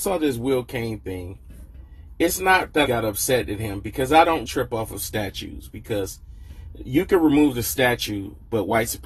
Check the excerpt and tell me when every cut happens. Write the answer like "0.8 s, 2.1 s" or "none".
2.8 s, 4.4 s

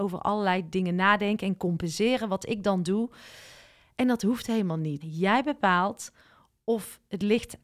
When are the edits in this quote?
5.0 s

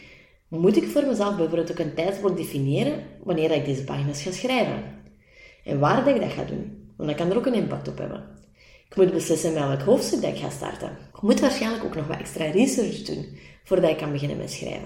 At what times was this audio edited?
11.1 s

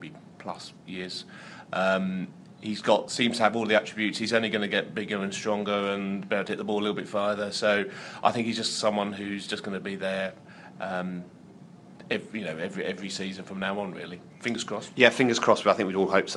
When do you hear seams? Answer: none

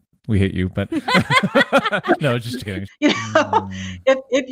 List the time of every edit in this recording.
2.9 s

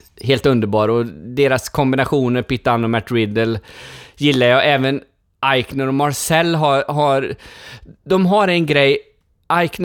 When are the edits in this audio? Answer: none

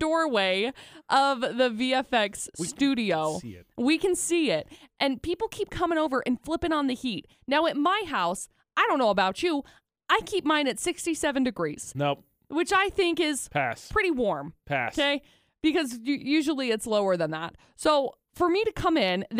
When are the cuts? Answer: none

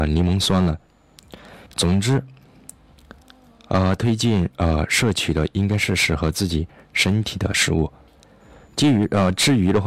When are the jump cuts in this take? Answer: 1.7 s, 8.7 s

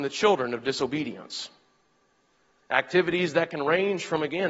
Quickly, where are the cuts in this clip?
2.6 s

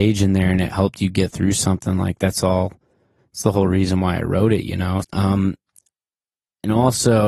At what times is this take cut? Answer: 5.0 s

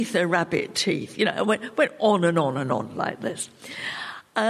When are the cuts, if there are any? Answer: none

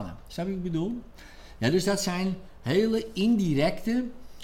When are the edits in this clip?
none

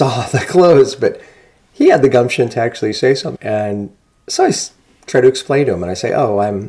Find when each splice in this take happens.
3.4 s

